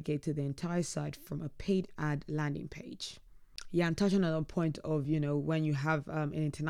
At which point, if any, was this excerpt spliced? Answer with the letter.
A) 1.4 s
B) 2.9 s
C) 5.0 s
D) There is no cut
D